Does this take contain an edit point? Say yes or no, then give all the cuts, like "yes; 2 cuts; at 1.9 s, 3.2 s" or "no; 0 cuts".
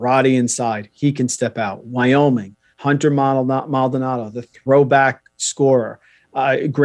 yes; 1 cut; at 2.7 s